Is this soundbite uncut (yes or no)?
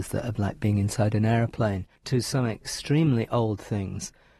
no